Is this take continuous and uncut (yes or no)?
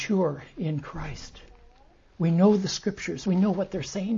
yes